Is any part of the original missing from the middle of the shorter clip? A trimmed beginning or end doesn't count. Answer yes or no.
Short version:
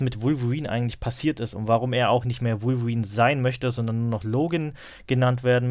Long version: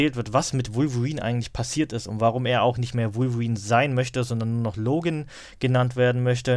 no